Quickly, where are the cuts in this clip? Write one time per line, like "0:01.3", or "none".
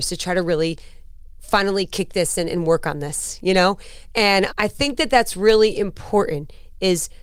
0:04.5